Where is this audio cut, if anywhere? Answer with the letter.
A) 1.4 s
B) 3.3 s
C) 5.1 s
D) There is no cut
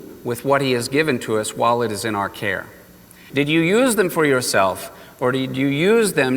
B